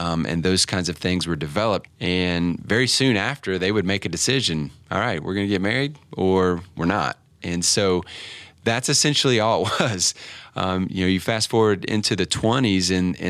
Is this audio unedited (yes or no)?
no